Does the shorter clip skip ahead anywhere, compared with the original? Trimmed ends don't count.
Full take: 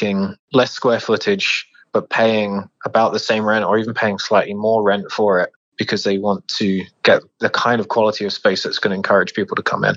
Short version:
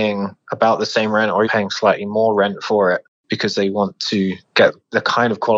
yes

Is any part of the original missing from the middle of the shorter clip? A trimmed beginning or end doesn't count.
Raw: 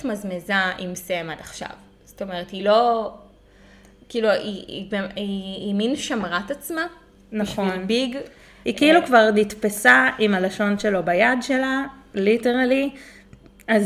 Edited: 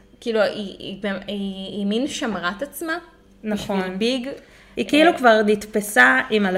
no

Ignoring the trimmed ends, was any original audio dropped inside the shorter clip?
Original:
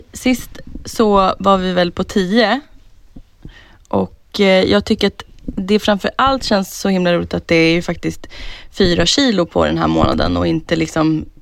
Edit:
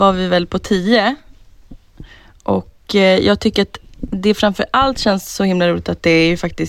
no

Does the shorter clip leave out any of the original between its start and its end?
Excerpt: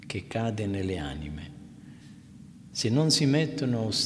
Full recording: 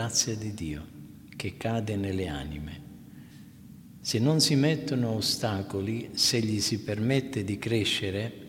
no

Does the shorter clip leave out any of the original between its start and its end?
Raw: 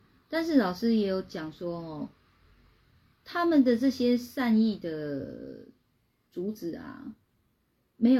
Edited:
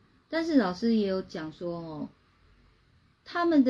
no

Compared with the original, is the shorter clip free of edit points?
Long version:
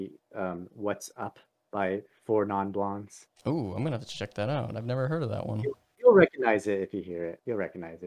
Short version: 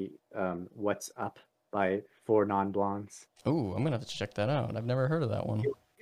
yes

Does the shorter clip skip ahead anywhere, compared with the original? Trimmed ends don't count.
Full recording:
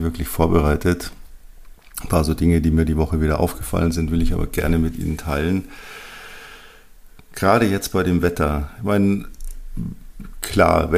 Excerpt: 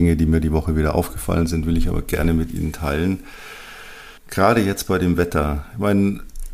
yes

